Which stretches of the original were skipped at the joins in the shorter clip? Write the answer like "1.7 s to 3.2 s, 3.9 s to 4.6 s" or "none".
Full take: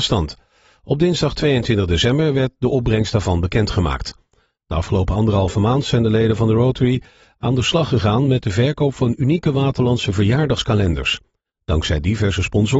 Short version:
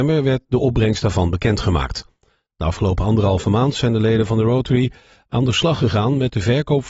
none